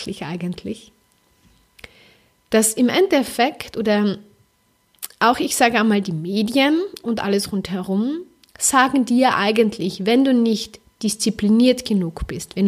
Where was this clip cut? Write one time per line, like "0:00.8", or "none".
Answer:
none